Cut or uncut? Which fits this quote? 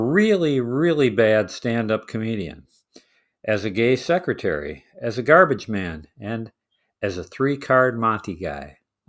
uncut